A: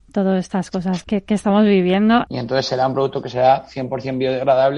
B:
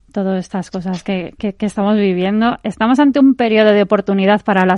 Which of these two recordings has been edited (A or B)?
A